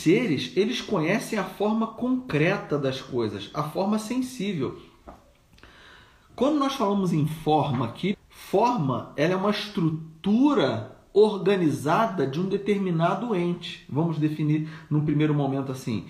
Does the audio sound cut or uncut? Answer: cut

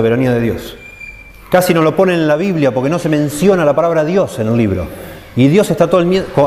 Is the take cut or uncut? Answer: uncut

